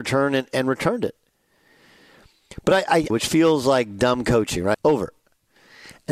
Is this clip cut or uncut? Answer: cut